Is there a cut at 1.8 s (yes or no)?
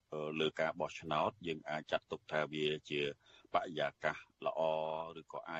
yes